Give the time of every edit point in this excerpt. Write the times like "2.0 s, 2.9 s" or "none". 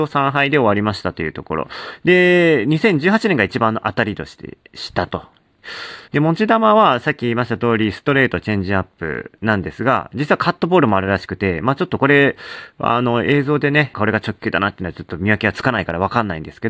6.1 s, 13.9 s